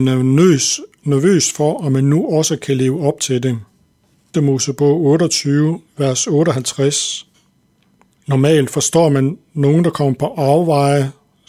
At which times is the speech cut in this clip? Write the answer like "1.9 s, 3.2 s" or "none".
4.3 s, 8.2 s